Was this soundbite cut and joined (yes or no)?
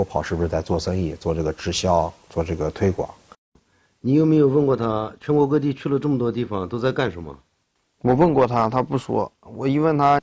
no